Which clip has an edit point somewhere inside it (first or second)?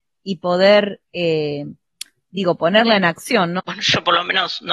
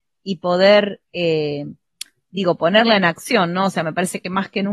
first